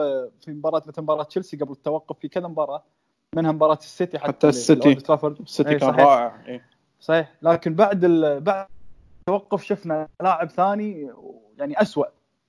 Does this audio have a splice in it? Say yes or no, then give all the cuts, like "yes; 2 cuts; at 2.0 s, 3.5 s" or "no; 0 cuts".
no; 0 cuts